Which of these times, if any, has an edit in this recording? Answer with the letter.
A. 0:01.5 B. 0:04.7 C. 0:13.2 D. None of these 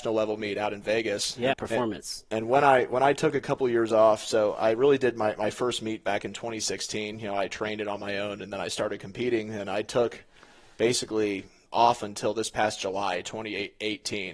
A